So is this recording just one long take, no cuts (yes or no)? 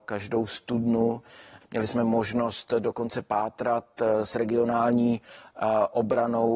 no